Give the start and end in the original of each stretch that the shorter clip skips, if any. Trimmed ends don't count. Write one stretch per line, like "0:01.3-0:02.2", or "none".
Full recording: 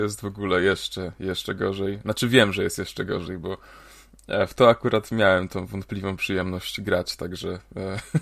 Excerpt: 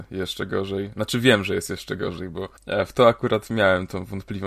0:03.7-0:04.2